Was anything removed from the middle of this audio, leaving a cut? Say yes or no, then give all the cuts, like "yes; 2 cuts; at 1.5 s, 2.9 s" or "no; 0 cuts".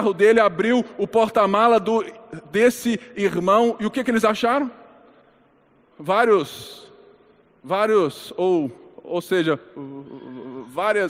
no; 0 cuts